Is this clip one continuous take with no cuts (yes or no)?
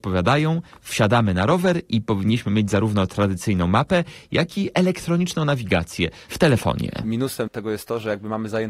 no